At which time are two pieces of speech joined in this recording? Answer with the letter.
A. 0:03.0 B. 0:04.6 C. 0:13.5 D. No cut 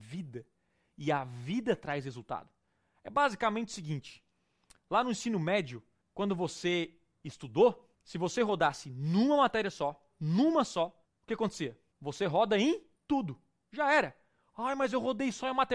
D